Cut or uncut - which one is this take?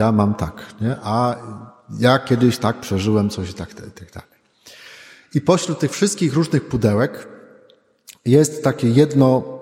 uncut